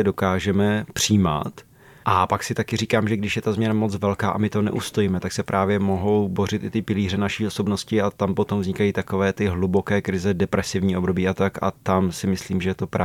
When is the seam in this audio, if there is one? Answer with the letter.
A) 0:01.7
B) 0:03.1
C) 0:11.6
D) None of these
D